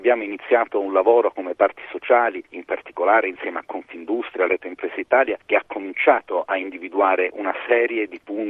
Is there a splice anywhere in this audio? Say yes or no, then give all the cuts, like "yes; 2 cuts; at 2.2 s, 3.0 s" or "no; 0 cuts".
yes; 1 cut; at 4.5 s